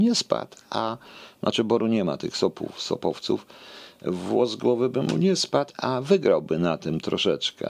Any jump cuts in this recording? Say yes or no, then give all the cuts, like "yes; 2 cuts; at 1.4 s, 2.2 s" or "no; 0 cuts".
no; 0 cuts